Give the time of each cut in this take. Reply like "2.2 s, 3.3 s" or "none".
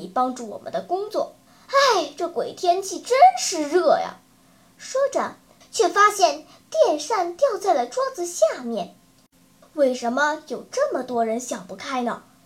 1.5 s, 5.6 s, 9.6 s

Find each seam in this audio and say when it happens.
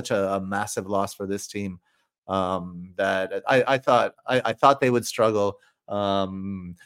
none

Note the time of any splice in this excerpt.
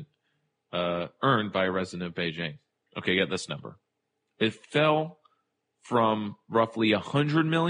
2.9 s

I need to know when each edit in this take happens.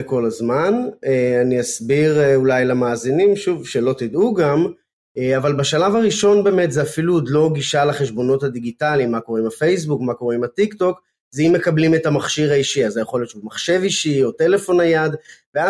none

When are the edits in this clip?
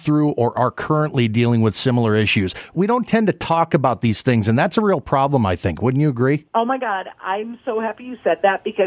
none

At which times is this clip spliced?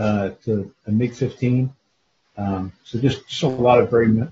2.2 s

